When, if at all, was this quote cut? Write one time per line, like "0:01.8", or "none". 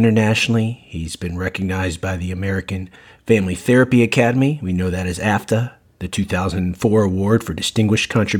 none